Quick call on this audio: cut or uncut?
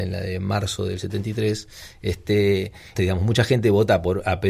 cut